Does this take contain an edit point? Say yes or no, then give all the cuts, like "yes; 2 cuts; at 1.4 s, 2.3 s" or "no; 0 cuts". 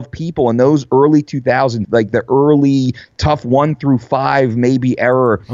yes; 1 cut; at 1.8 s